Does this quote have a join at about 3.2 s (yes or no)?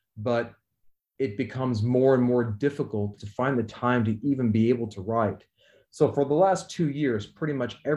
yes